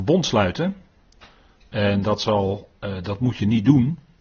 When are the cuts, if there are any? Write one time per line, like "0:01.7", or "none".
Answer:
none